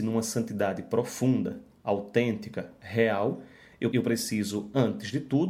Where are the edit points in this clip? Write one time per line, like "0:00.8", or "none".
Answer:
0:03.9